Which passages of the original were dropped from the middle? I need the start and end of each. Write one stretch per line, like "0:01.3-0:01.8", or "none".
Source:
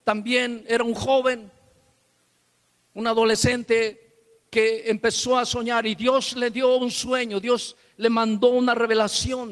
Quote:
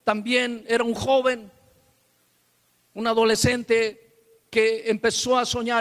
none